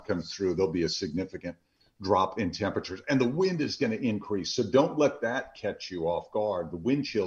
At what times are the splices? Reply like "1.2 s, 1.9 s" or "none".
none